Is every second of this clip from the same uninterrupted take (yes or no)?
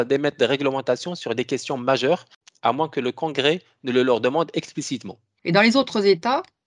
no